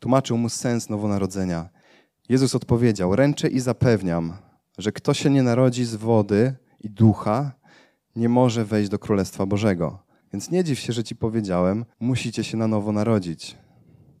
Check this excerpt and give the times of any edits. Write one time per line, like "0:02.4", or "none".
0:10.2
0:11.9